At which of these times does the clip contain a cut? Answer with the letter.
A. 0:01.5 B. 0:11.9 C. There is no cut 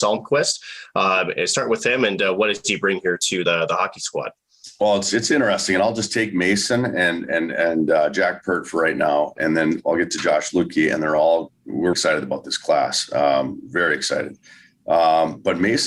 B